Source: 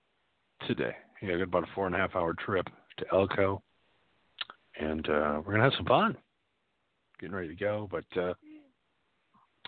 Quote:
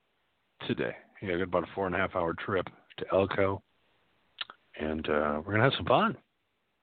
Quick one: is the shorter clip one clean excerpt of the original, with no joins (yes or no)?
yes